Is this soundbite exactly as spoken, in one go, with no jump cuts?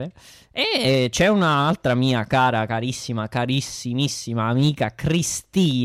yes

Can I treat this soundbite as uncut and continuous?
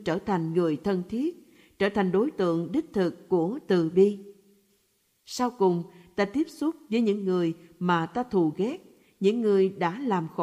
yes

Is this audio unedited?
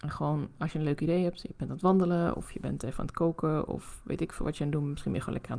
yes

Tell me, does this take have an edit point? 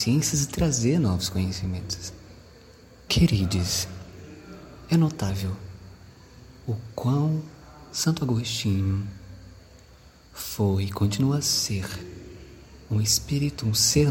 yes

